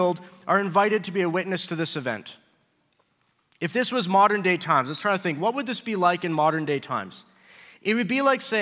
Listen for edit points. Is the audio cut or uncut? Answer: uncut